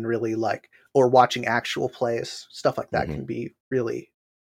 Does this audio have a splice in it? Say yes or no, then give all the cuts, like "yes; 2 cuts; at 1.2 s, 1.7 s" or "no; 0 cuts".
no; 0 cuts